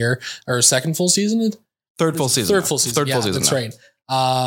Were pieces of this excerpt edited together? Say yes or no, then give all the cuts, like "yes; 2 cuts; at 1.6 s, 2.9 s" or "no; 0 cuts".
no; 0 cuts